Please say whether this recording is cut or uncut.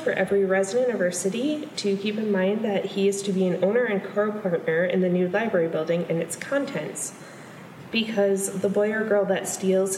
uncut